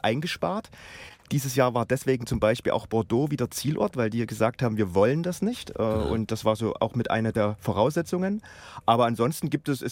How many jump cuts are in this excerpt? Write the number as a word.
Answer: zero